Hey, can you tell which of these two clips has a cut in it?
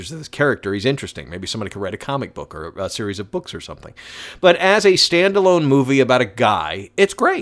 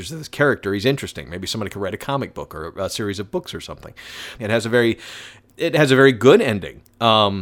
second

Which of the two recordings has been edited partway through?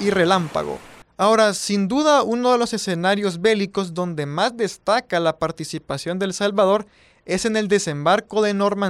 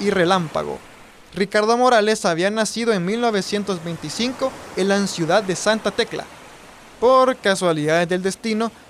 first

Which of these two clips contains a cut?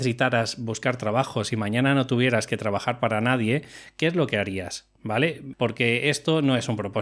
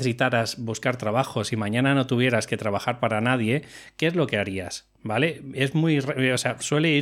first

